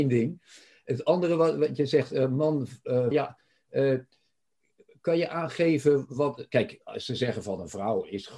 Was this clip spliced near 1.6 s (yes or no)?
no